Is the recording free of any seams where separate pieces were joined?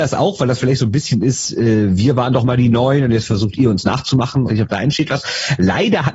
no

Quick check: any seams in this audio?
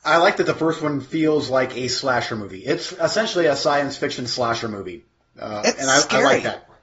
no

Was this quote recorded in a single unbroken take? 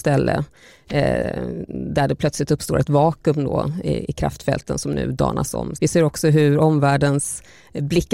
no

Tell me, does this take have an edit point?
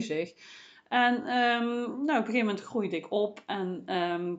no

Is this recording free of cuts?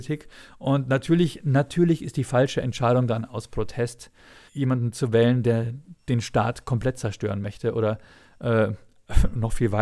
no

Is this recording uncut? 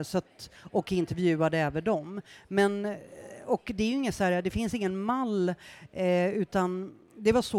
yes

